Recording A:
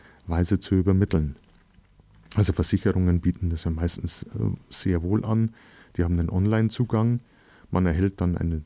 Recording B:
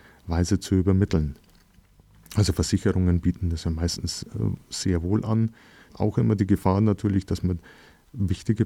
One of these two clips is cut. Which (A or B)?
B